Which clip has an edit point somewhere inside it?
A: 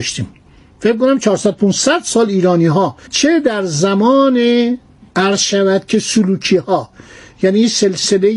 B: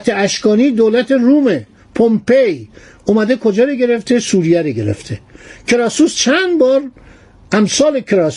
A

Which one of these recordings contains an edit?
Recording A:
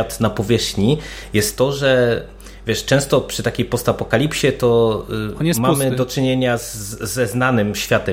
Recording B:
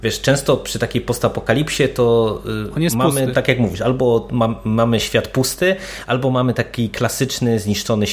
B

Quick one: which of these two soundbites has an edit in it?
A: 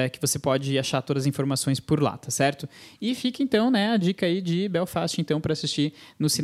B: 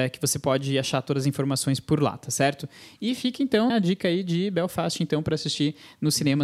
B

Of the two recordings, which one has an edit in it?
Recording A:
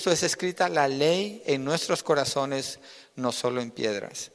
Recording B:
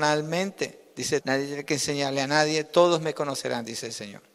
B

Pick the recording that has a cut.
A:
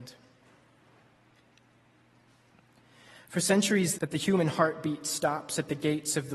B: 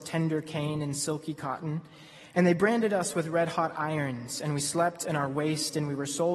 A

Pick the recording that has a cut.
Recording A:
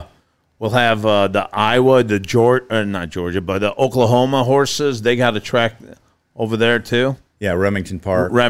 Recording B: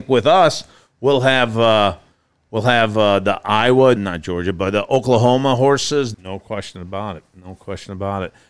B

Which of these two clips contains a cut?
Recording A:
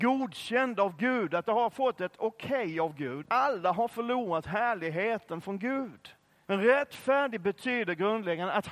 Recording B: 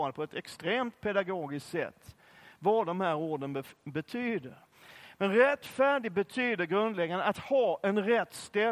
A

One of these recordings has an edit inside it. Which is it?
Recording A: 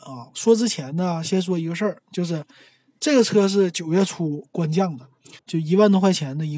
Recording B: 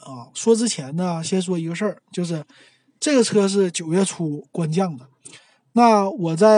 A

